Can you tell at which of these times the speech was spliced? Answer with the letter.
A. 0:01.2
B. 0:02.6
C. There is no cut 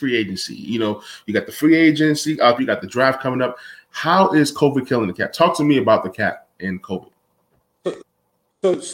B